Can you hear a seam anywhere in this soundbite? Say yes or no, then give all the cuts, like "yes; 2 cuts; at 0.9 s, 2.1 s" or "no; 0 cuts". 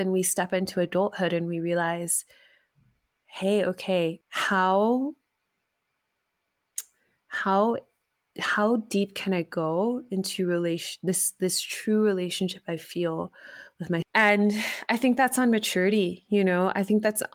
yes; 2 cuts; at 4.2 s, 14.0 s